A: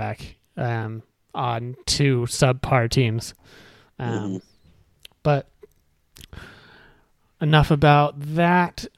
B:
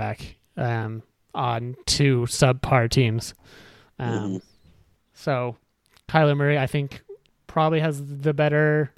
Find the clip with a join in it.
B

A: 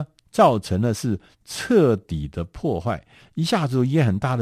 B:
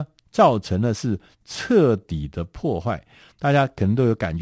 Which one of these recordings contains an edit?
A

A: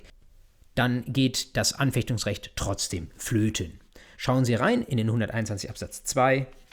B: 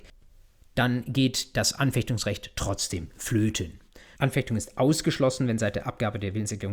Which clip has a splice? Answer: B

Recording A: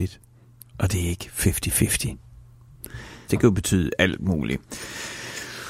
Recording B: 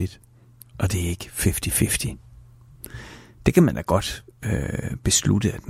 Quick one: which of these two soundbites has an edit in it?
A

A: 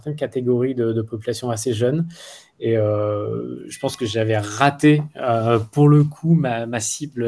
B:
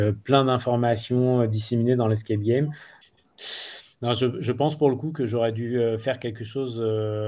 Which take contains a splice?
B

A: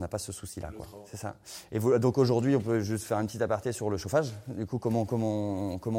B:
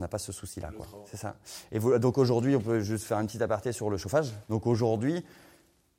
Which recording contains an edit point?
B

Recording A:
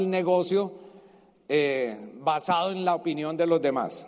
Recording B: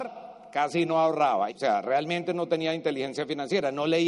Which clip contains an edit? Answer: B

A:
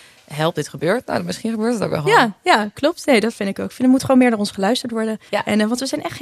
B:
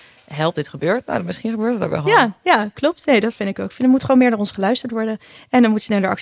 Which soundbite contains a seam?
A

